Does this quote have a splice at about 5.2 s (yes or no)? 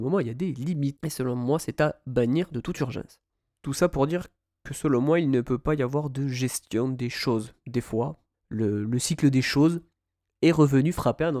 no